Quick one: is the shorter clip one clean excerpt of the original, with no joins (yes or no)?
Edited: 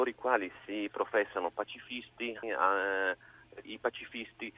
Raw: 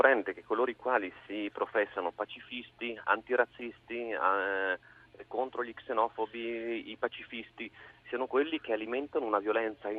no